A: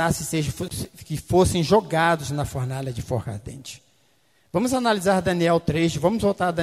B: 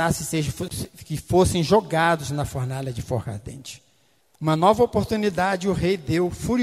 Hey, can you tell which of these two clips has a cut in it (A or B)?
B